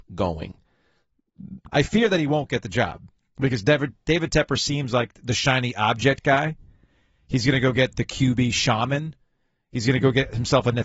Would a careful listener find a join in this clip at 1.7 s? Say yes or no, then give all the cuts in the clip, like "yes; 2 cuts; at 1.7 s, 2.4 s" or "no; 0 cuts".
yes; 1 cut; at 1.7 s